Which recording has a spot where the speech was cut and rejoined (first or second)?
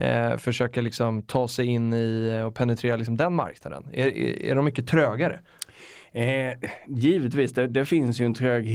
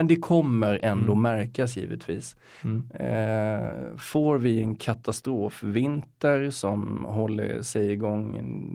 second